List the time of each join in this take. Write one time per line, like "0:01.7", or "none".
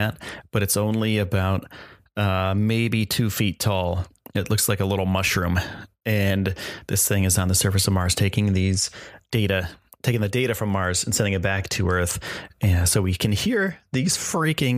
0:09.3